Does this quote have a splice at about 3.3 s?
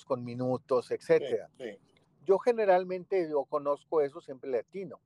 no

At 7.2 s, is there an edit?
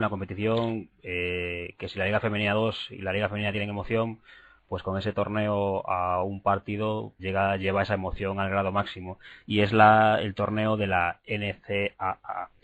yes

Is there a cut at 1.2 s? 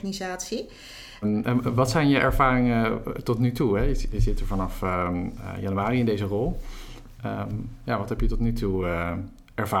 yes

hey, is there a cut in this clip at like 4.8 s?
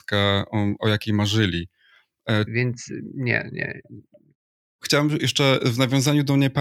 no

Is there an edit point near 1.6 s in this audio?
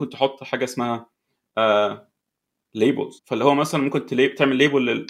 no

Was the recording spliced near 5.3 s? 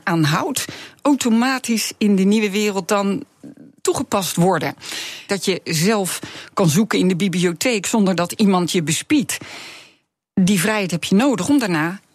yes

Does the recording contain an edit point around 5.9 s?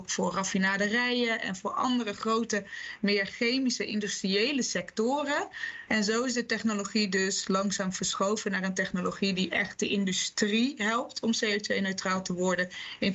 yes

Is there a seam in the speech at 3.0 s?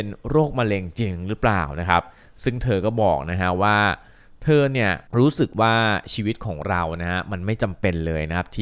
no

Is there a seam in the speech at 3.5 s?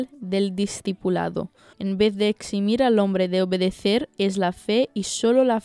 no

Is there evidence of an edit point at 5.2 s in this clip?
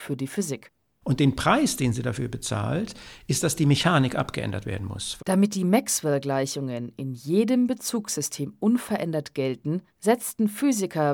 yes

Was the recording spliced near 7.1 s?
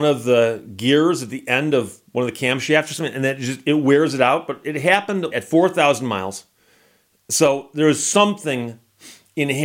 no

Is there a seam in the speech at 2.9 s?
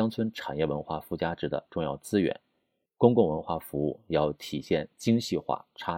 yes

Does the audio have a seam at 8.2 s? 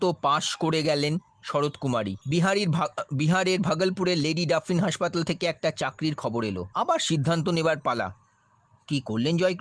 no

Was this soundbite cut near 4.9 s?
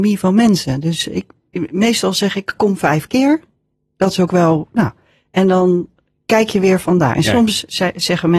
no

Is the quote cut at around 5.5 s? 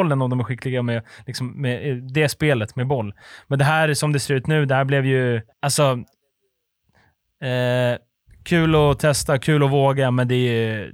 yes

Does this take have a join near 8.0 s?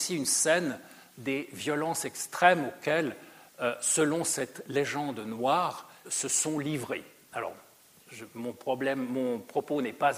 no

